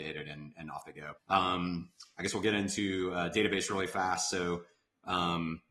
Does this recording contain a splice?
yes; 1 cut; at 1.2 s

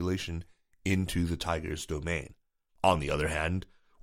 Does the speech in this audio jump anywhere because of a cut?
yes; 1 cut; at 2.7 s

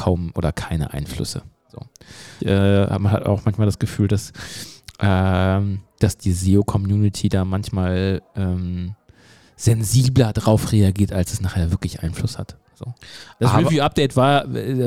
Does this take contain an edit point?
yes; 1 cut; at 2.4 s

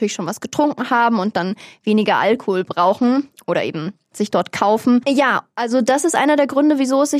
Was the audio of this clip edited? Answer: yes; 1 cut; at 5.0 s

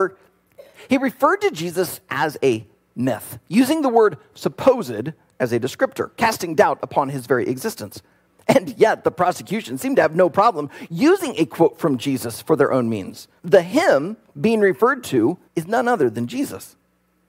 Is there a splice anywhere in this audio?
yes; 2 cuts; at 13.4 s, 15.5 s

